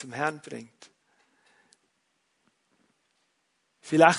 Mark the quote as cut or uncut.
uncut